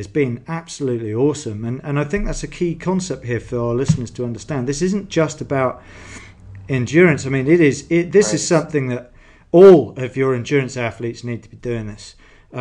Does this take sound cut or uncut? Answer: uncut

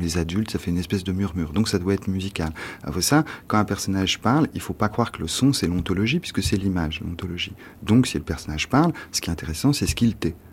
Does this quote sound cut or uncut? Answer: uncut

